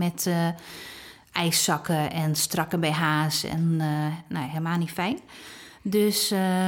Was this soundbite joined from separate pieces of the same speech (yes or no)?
no